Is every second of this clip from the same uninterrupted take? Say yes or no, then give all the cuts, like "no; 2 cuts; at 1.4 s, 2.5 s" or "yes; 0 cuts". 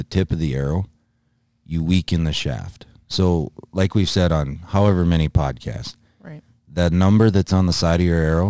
yes; 0 cuts